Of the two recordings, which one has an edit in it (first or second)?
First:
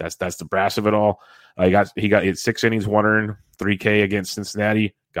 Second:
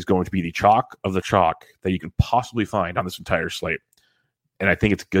second